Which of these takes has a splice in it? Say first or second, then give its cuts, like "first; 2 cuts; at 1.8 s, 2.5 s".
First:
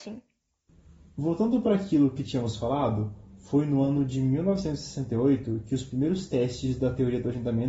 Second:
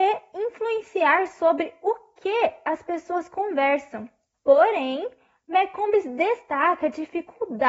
second; 1 cut; at 4.3 s